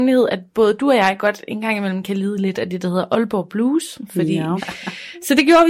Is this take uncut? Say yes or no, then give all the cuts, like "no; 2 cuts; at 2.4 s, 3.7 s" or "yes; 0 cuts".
no; 1 cut; at 4.6 s